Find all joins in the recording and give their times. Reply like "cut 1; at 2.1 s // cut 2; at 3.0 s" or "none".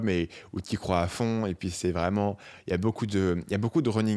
none